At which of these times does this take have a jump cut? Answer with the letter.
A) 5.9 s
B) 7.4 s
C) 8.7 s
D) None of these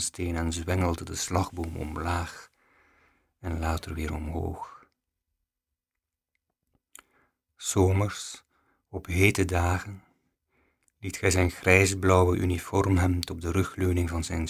D